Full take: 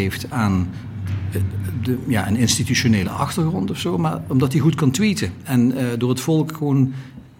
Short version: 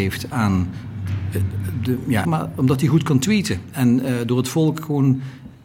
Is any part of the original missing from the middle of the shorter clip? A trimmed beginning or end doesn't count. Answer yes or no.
yes